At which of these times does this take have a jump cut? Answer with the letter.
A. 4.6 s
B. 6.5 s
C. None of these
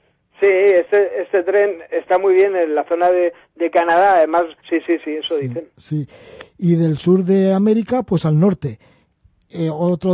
A